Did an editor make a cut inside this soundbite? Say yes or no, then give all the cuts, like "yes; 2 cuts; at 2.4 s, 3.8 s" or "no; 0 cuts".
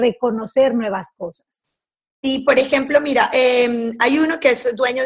no; 0 cuts